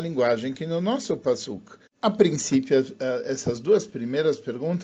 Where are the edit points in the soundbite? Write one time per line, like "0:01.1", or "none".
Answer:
0:01.9